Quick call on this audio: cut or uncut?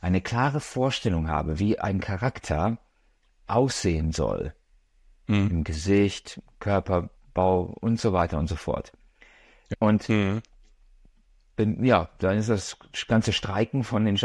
cut